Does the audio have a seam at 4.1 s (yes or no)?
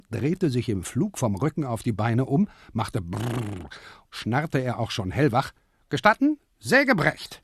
yes